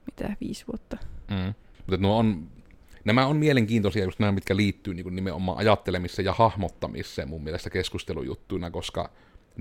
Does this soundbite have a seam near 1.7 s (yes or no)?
yes